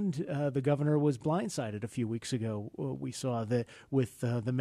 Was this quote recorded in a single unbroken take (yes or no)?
yes